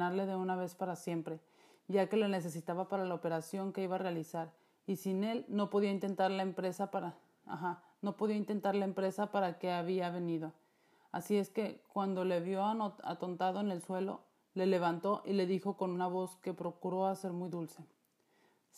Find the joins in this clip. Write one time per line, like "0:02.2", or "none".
none